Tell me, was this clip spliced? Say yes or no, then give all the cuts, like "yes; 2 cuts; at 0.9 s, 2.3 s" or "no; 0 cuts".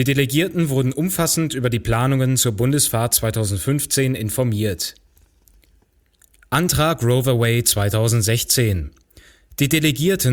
no; 0 cuts